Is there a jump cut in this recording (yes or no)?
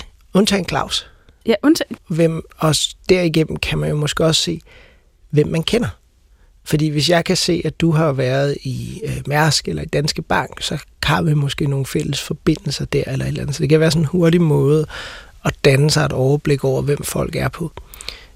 yes